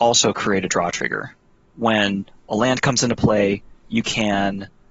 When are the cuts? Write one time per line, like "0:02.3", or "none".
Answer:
0:01.7